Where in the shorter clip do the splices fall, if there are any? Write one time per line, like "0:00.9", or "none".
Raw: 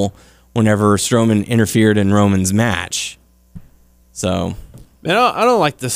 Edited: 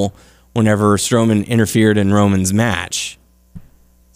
none